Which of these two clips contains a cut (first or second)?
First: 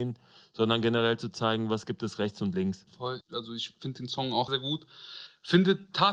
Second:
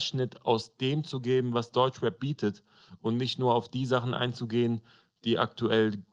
first